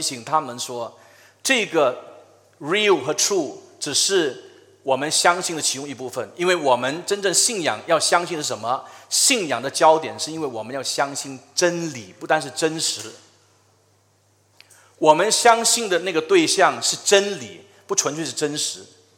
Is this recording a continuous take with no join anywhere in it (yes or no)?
yes